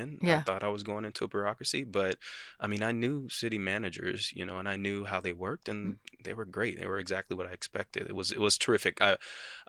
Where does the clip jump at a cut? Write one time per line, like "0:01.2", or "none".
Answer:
none